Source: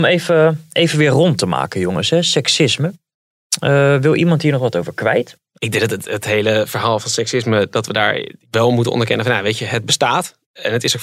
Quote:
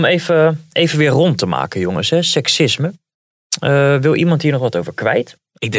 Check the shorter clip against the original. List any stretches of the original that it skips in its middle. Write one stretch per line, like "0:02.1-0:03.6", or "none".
none